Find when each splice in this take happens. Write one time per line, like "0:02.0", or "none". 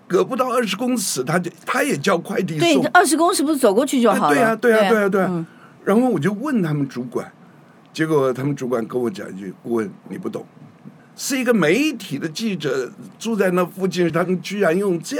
0:11.0
0:14.1